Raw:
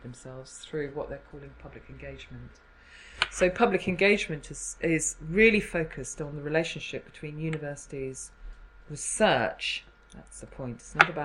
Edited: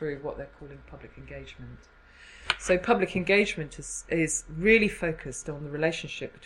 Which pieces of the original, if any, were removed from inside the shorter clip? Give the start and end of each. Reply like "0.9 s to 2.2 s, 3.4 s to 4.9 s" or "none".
none

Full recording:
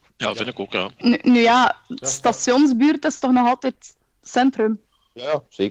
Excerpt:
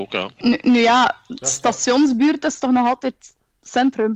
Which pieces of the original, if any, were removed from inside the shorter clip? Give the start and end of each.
none

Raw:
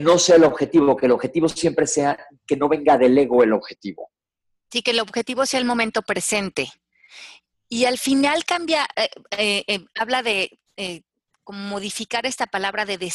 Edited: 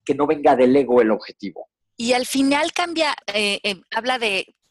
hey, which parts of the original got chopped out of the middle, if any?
4.2 s to 7.5 s, 8.9 s to 9.3 s

